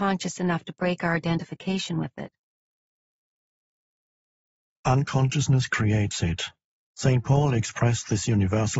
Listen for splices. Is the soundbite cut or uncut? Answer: cut